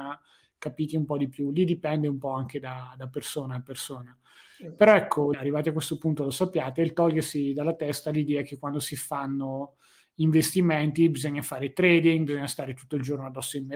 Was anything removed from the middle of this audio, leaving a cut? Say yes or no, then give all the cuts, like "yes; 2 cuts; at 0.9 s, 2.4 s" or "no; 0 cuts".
yes; 1 cut; at 5.3 s